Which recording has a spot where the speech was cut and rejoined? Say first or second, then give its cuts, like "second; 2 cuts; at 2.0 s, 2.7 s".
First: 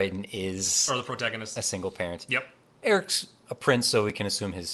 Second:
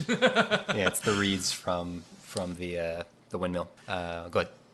second; 1 cut; at 3.8 s